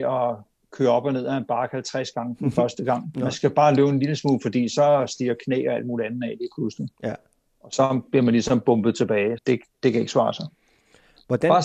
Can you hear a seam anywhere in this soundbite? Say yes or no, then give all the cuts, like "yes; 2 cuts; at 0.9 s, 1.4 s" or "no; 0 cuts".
yes; 1 cut; at 9.4 s